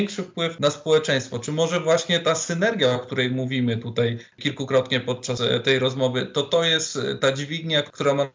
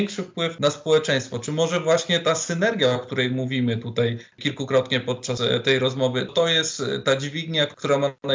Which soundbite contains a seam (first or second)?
second